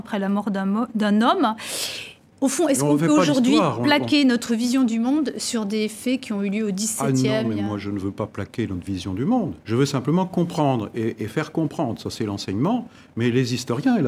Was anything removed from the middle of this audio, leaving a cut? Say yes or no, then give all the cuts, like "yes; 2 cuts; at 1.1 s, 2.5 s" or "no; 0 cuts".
yes; 1 cut; at 9.6 s